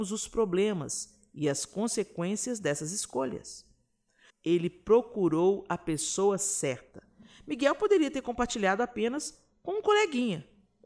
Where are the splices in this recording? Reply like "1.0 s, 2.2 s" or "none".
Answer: 4.3 s